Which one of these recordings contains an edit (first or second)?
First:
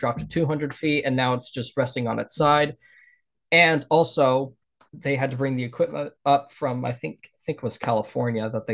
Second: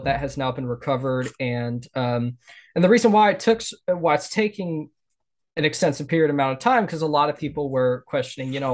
first